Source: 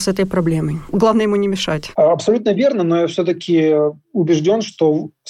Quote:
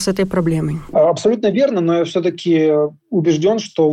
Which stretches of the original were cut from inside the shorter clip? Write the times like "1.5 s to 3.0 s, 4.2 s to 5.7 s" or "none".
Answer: 0.9 s to 1.9 s